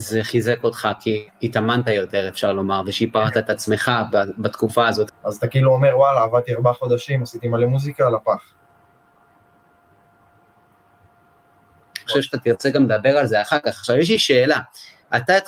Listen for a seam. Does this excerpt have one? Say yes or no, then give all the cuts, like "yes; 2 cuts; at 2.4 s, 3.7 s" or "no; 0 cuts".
yes; 2 cuts; at 5.1 s, 12.1 s